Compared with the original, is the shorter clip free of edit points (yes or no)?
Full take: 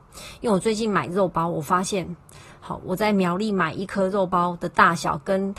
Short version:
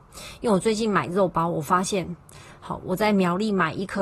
yes